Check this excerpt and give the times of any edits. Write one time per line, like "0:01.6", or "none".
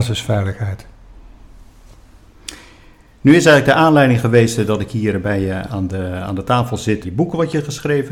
0:07.0